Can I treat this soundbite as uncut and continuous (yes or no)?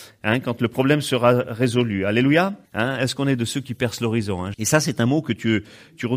no